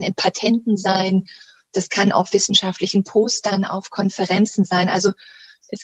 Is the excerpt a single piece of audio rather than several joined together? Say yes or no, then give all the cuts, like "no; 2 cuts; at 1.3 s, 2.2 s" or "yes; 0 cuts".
yes; 0 cuts